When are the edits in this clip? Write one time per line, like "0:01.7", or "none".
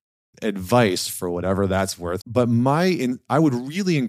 0:02.2